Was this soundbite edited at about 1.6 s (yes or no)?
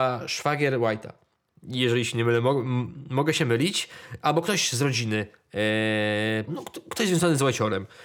no